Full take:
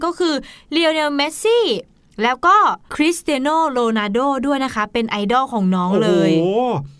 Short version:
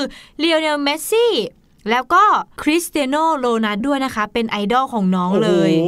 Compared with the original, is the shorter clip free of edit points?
no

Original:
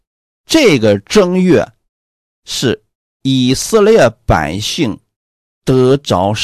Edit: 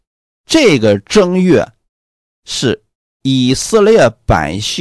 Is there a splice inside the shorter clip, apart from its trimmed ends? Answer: no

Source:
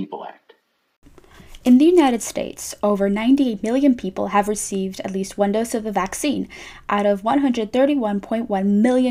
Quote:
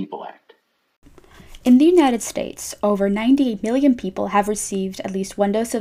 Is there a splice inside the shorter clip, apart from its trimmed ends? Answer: no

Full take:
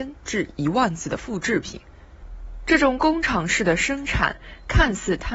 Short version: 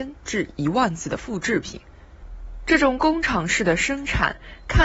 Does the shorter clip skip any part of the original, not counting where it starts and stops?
no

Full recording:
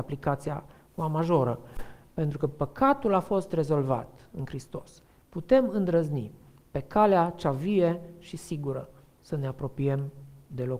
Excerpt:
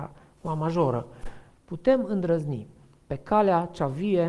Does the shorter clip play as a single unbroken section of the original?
no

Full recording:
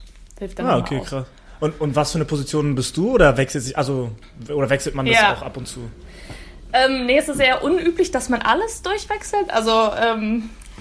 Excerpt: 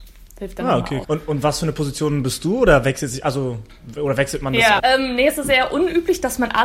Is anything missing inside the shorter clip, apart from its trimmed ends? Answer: yes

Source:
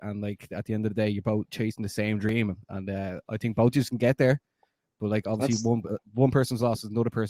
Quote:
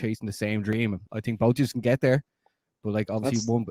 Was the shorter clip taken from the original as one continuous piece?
no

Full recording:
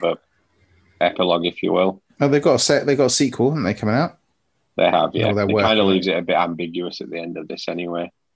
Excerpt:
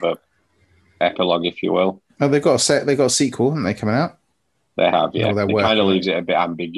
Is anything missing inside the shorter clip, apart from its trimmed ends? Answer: no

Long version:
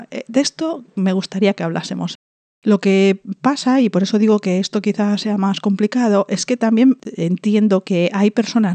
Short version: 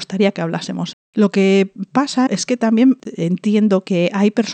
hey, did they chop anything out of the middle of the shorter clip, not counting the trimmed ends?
yes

